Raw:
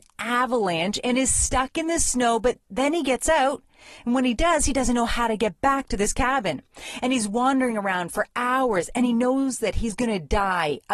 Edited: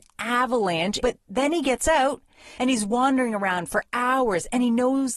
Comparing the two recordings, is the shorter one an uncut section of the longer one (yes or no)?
no